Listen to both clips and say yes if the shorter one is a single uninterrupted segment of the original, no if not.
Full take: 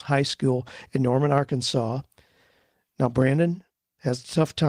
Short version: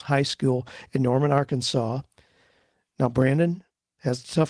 yes